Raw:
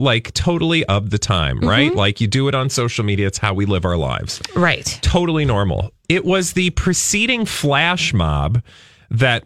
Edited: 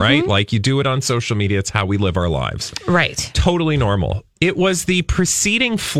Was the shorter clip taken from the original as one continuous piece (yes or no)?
yes